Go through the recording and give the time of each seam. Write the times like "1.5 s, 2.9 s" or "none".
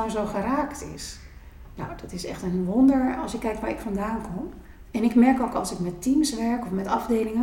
4.8 s